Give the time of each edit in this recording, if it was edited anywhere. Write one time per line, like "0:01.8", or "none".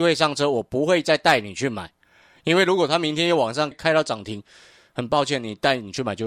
0:03.7

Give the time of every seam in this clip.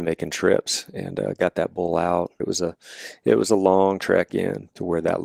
0:02.4

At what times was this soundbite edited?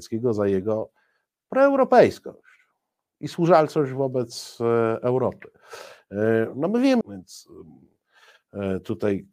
0:07.0

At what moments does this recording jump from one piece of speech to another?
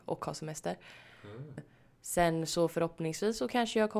0:01.6

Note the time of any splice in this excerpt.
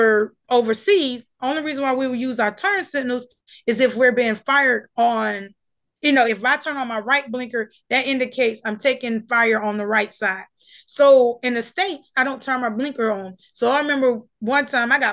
0:06.3

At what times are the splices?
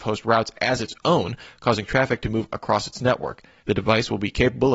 0:03.6

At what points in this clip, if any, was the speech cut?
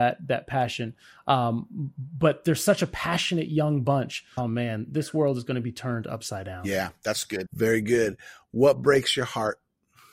0:04.4
0:07.5

